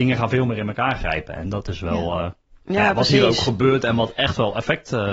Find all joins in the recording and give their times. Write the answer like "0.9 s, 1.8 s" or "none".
none